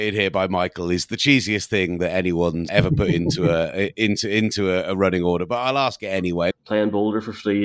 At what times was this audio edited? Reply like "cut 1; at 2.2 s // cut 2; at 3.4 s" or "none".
cut 1; at 2.7 s // cut 2; at 6.5 s